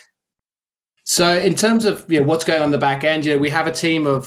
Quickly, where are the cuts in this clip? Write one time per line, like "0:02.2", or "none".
none